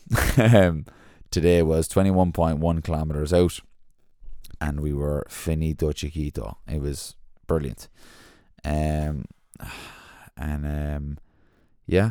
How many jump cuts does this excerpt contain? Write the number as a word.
one